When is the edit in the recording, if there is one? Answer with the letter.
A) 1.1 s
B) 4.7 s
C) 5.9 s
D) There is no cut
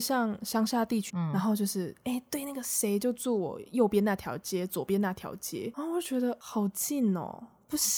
A